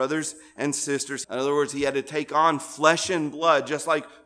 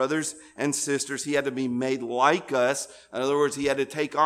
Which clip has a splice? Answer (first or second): first